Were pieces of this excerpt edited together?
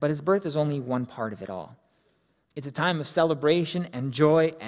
yes; 1 cut; at 2.4 s

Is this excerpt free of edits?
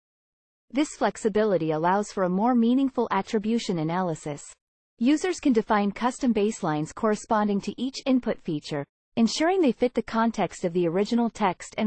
no; 1 cut; at 4.8 s

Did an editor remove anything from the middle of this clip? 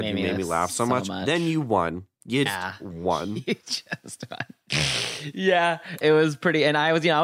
yes; 2 cuts; at 2.5 s, 6.0 s

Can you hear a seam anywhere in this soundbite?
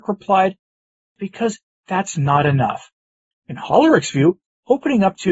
yes; 2 cuts; at 1.2 s, 3.3 s

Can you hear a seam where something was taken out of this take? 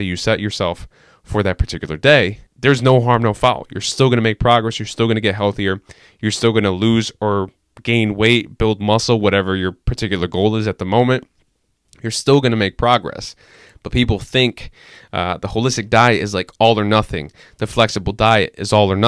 yes; 1 cut; at 2.5 s

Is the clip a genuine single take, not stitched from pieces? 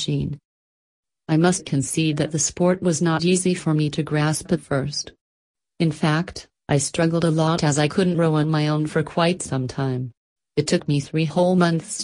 no; 1 cut; at 10.4 s

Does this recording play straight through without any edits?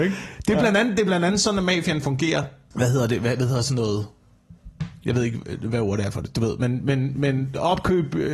no; 1 cut; at 2.7 s

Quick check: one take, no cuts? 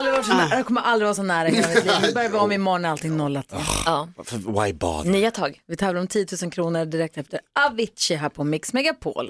yes; 0 cuts

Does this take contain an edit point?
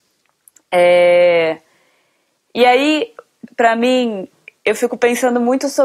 yes; 1 cut; at 3.5 s

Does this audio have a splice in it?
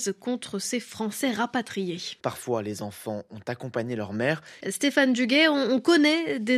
yes; 2 cuts; at 2.2 s, 4.6 s

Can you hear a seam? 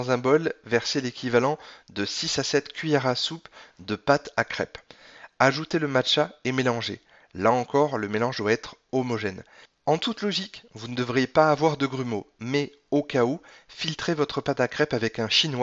yes; 1 cut; at 9.6 s

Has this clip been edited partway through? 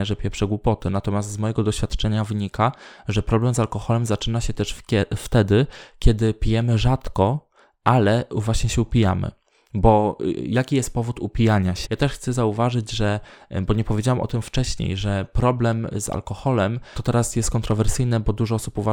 yes; 1 cut; at 11.9 s

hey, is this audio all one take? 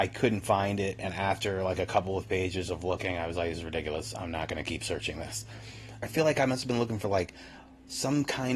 no; 1 cut; at 6.0 s

